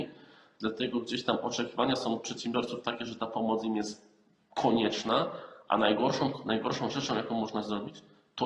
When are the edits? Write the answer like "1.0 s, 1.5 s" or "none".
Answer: none